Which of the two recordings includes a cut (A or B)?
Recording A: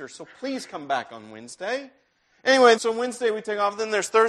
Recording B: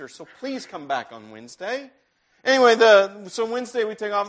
A